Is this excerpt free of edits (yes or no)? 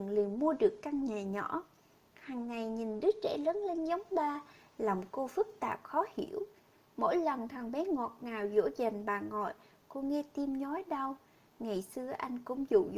yes